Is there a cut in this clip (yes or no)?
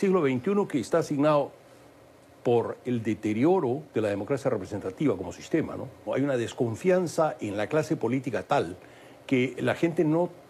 yes